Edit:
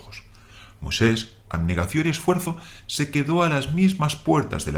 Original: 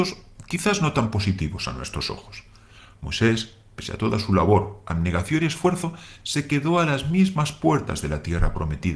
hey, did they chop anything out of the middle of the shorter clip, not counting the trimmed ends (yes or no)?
yes